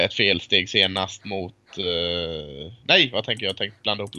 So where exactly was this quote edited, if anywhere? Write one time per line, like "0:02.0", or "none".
none